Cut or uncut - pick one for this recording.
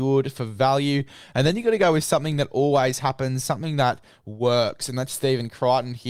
uncut